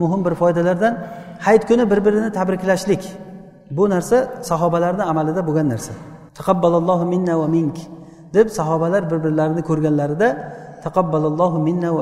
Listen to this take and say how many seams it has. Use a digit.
1